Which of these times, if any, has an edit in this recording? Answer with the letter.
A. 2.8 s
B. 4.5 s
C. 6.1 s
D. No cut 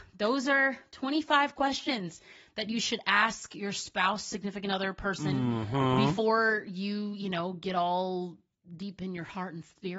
D